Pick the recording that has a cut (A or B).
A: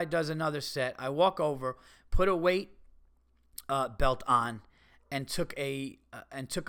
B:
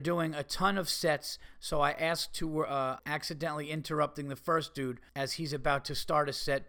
B